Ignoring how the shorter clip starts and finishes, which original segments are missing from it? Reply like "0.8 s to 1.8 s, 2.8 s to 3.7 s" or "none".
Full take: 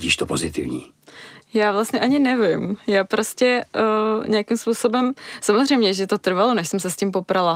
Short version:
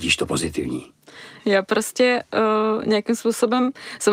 1.4 s to 2.8 s